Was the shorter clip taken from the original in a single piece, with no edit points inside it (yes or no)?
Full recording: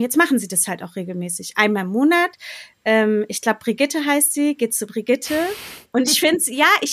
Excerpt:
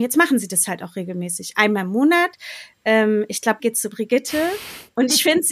no